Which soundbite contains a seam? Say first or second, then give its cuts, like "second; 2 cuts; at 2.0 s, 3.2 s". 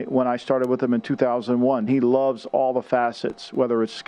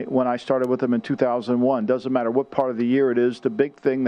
first; 1 cut; at 1.9 s